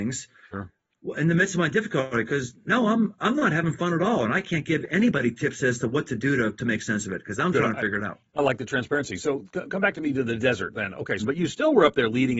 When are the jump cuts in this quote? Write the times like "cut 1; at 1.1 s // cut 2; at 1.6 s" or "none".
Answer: cut 1; at 11.2 s